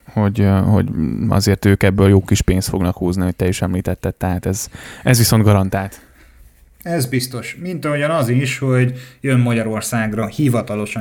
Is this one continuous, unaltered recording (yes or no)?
yes